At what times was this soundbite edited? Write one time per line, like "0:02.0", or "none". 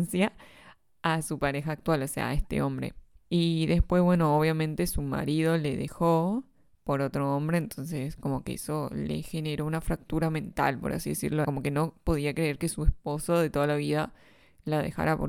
0:03.1
0:11.4